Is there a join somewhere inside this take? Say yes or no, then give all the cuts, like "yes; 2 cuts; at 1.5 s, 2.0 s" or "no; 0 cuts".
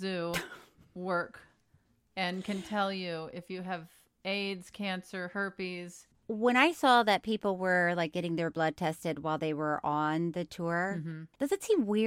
no; 0 cuts